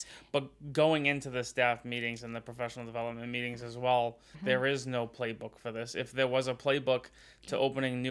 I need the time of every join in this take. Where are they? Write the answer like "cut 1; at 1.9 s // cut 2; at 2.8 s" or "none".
cut 1; at 4.3 s